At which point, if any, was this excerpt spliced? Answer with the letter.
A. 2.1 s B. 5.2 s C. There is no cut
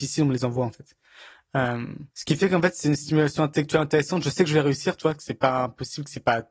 A